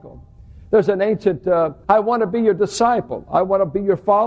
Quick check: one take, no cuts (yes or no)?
no